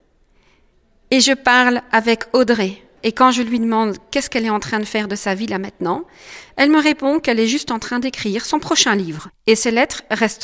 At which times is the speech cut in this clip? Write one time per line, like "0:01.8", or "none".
0:03.0
0:09.3

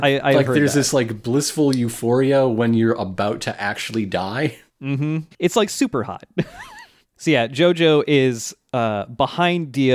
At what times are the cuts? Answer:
0:05.3

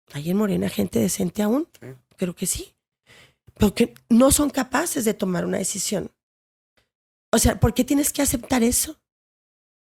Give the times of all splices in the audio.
none

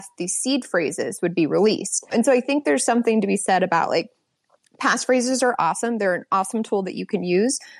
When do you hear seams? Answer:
0:02.1

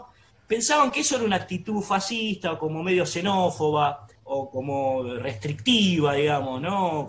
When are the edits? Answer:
0:04.2

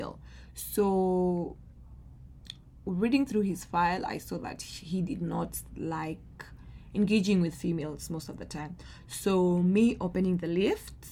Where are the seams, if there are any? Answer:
none

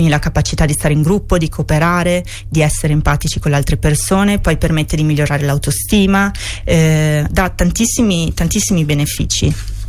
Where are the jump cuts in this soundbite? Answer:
0:07.3

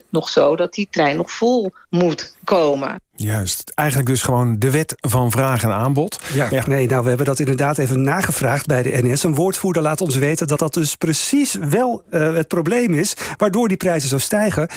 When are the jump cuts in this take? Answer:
0:06.6

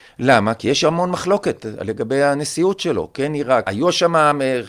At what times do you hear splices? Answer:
0:03.7

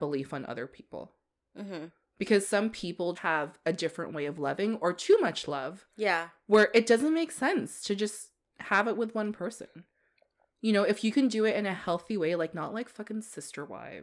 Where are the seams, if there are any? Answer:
0:03.1

